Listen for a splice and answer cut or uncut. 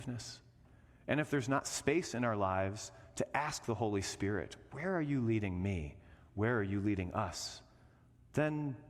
uncut